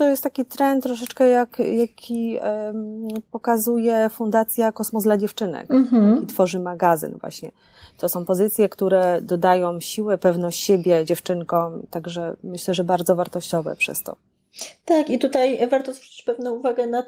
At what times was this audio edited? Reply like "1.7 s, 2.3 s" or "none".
none